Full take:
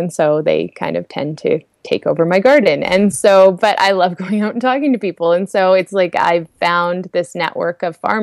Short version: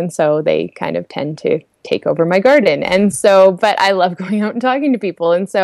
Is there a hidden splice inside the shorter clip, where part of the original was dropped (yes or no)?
no